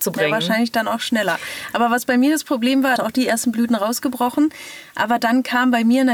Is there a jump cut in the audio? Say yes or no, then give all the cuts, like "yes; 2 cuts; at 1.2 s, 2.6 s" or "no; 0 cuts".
yes; 1 cut; at 3.0 s